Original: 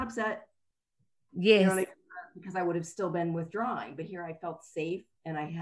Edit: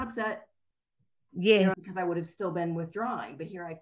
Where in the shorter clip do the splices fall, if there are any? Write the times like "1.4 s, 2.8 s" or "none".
1.7 s